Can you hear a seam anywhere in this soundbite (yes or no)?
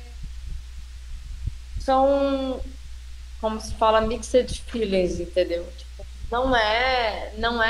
no